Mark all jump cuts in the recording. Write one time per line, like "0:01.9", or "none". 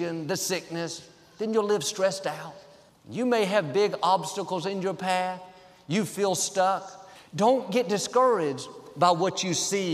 0:02.9
0:07.2